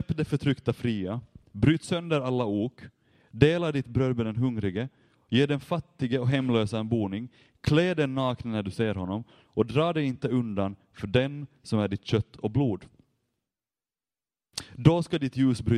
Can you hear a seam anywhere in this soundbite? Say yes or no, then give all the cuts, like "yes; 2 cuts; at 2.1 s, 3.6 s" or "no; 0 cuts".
no; 0 cuts